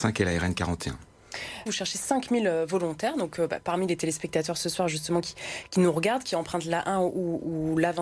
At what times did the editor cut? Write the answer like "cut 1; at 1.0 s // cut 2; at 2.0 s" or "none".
cut 1; at 1.7 s